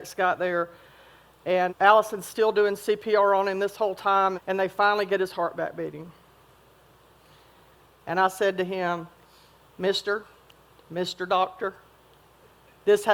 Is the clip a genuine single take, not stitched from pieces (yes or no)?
no